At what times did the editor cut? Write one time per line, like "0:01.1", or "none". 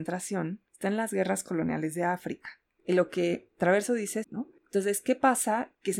0:02.8
0:04.2